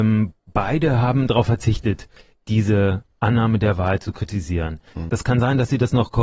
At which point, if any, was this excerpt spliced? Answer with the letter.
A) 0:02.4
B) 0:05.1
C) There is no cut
B